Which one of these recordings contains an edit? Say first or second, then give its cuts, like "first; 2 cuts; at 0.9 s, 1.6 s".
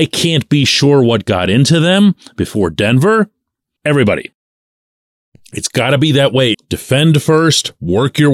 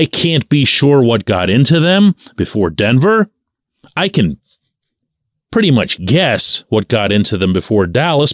first; 2 cuts; at 3.8 s, 6.5 s